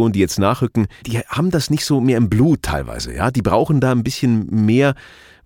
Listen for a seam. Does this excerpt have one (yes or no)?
yes